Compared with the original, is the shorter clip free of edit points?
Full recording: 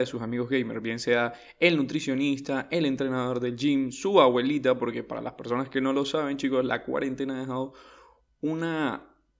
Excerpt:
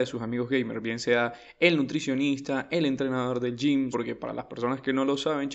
no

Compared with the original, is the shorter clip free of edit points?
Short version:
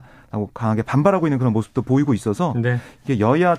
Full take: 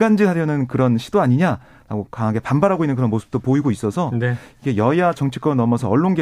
yes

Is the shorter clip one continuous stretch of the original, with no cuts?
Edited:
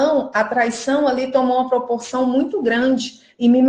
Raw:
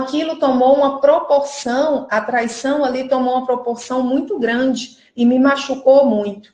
yes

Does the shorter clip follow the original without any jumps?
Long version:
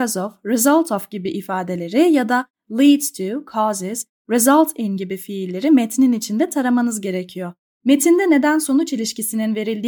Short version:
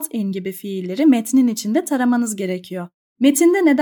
yes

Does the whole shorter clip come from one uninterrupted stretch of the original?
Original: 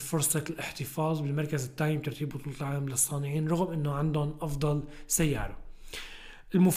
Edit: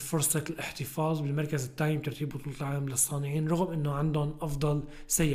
yes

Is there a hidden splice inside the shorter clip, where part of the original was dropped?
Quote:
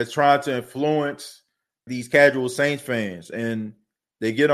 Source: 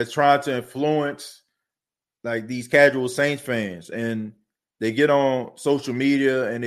yes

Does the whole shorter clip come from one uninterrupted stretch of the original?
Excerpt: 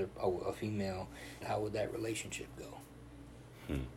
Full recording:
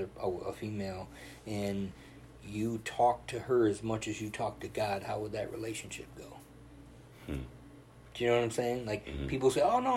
no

